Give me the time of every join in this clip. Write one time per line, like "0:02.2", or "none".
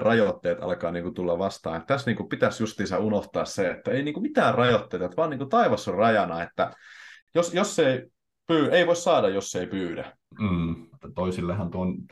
0:10.9